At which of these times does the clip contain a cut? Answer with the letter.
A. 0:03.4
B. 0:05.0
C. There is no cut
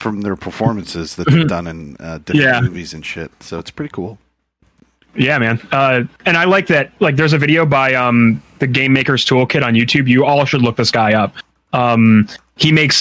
C